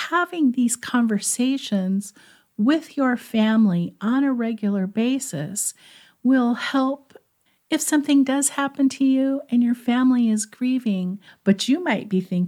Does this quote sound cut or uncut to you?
cut